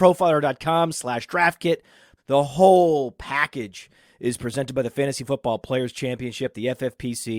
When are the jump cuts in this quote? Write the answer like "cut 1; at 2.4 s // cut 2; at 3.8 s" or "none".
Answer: cut 1; at 2.2 s